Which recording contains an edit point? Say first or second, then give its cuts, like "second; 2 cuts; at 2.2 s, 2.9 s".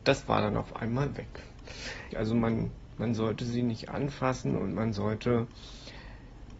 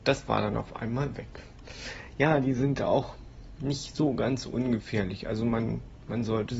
first; 1 cut; at 2.1 s